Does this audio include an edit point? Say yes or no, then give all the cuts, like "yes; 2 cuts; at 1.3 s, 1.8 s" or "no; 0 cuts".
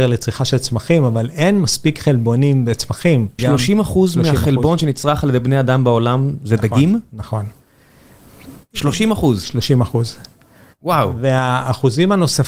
yes; 1 cut; at 3.4 s